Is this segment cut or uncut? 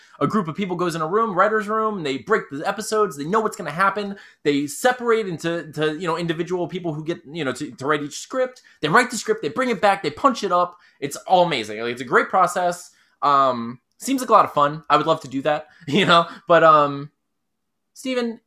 uncut